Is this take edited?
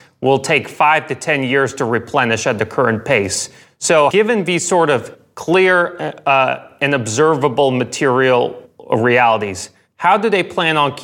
yes; 1 cut; at 4.1 s

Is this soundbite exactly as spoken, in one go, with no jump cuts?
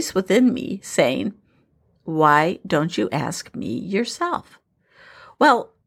yes; 0 cuts

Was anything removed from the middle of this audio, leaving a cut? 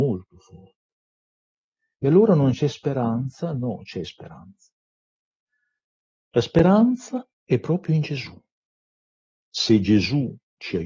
yes; 1 cut; at 7.3 s

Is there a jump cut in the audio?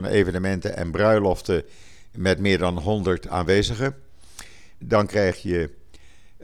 yes; 1 cut; at 4.8 s

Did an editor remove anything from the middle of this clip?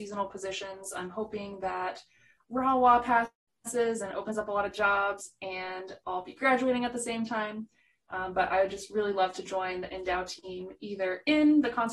no; 0 cuts

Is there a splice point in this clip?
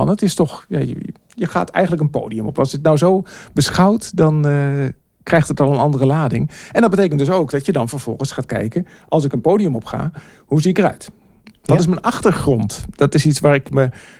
yes; 1 cut; at 1.2 s

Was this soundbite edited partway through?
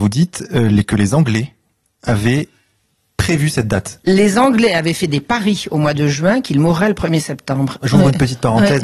yes; 1 cut; at 7.8 s

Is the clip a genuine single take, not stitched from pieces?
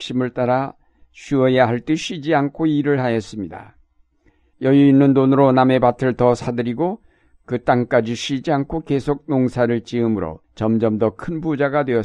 no; 2 cuts; at 4.5 s, 10.4 s

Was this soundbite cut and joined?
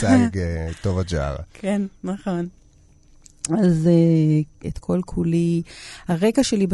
yes; 1 cut; at 4.6 s

